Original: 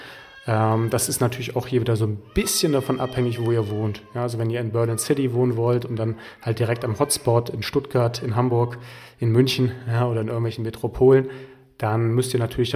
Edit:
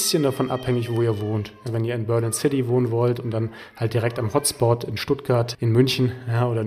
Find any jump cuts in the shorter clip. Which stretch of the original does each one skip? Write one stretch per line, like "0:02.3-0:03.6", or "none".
0:04.2-0:04.3
0:08.2-0:09.1